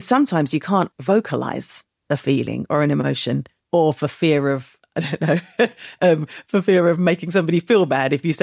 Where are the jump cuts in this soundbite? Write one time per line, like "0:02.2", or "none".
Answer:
0:00.9